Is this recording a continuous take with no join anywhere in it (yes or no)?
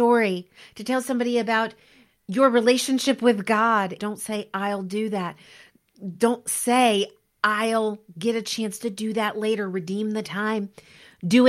no